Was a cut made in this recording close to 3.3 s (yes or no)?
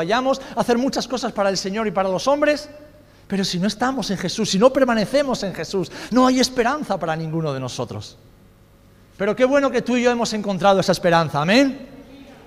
no